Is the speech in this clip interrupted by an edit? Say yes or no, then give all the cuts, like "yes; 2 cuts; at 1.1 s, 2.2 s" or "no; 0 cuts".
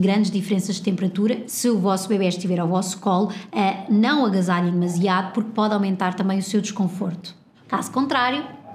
yes; 2 cuts; at 1.5 s, 7.6 s